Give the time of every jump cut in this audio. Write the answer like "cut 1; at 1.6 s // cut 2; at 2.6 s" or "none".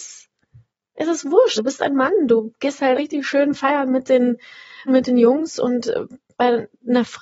cut 1; at 1.6 s // cut 2; at 2.9 s // cut 3; at 4.9 s

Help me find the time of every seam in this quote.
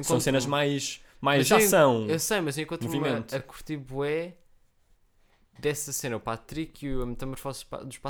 none

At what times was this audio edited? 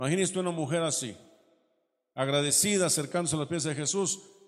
none

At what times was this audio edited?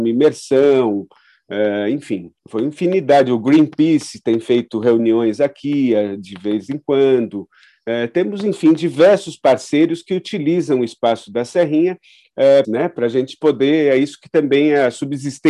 cut 1; at 2.4 s // cut 2; at 12.6 s

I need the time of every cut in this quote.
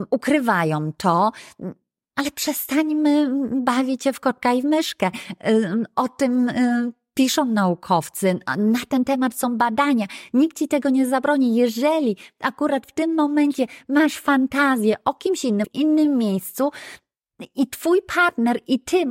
cut 1; at 15.6 s

